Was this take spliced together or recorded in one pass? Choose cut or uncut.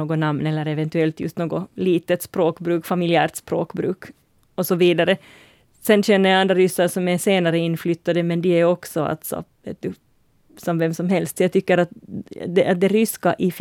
uncut